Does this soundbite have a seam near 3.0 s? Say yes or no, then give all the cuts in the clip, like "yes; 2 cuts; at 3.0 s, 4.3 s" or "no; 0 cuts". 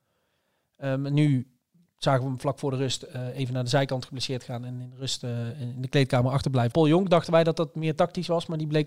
no; 1 cut; at 6.7 s